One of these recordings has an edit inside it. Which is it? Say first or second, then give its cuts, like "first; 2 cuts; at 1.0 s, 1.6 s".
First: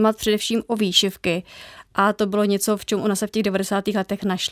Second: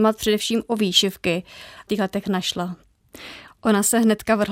second; 2 cuts; at 1.9 s, 3.5 s